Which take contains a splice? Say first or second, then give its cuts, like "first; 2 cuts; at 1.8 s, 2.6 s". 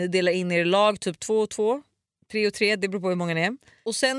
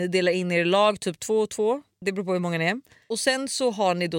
second; 1 cut; at 2.0 s